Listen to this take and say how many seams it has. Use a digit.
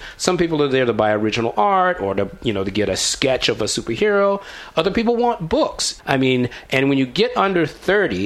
1